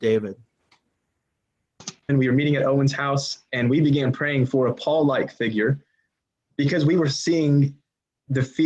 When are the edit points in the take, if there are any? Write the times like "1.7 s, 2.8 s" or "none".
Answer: 2.1 s